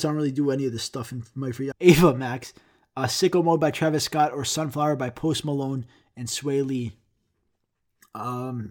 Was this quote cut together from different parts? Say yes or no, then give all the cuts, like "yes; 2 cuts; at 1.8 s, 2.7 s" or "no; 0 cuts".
yes; 1 cut; at 1.7 s